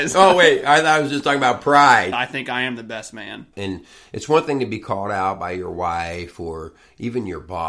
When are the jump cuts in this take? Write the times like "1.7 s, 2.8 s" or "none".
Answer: 2.1 s, 3.5 s